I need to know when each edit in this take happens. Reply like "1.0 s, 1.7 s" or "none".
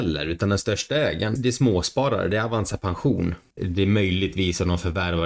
1.4 s, 3.6 s